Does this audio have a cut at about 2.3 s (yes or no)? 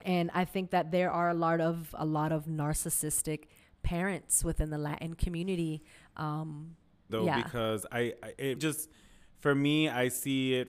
no